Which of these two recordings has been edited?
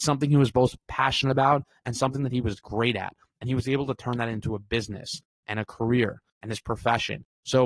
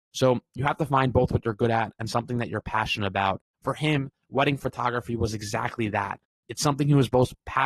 second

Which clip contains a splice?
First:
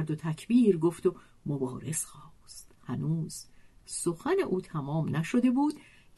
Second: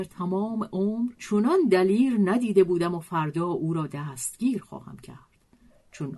second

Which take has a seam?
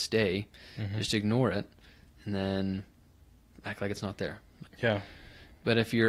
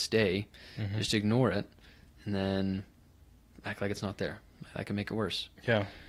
first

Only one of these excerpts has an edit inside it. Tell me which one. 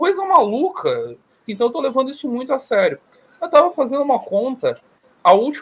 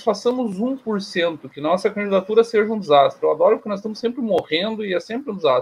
first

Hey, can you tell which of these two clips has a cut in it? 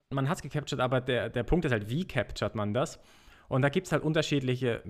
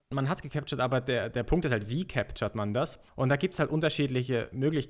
second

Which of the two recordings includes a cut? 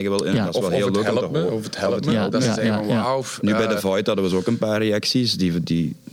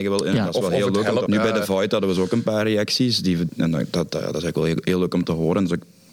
second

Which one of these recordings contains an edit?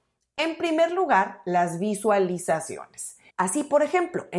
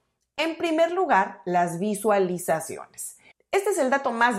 first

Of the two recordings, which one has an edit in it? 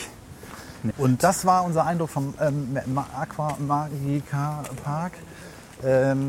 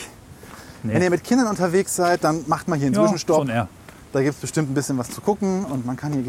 first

